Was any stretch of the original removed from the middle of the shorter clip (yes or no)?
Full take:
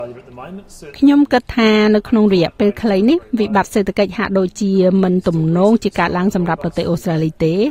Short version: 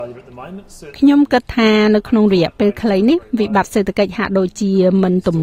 no